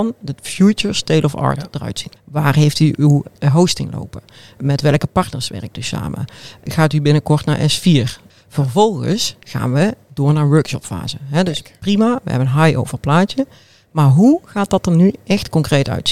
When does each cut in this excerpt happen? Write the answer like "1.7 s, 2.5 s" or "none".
2.2 s, 8.3 s